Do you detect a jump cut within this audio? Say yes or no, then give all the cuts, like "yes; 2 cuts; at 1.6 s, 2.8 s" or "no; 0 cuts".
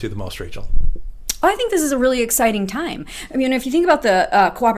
no; 0 cuts